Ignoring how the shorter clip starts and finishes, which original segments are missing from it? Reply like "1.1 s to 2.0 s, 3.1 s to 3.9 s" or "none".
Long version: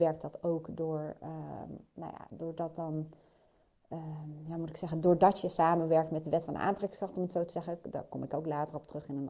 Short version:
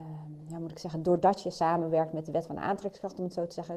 none